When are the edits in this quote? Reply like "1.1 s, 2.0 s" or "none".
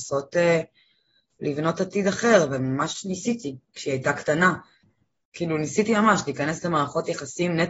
none